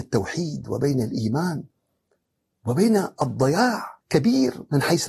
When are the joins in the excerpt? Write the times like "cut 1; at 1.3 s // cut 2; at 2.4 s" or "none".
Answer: cut 1; at 4.0 s